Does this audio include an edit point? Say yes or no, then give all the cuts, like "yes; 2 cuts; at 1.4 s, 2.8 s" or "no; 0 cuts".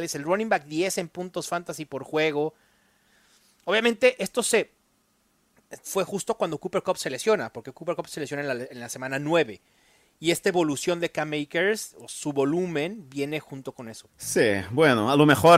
yes; 2 cuts; at 5.8 s, 14.1 s